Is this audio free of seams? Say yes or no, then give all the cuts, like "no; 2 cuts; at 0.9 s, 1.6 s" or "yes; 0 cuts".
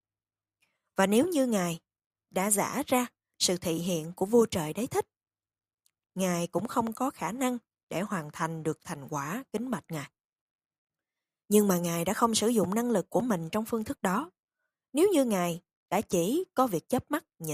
no; 1 cut; at 6.0 s